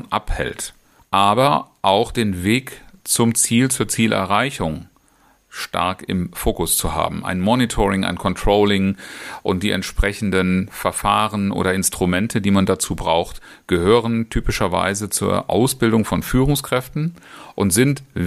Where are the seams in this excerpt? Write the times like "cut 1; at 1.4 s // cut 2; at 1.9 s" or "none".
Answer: cut 1; at 1.0 s